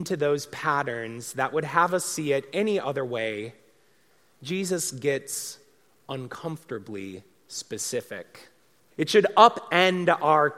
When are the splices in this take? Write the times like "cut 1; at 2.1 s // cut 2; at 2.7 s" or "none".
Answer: cut 1; at 8.9 s